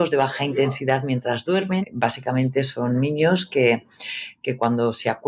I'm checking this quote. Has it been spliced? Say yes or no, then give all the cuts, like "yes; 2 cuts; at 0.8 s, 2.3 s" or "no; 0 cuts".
yes; 1 cut; at 1.8 s